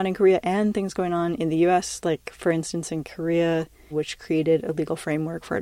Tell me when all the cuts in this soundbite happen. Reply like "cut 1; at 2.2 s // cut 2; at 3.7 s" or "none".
cut 1; at 3.9 s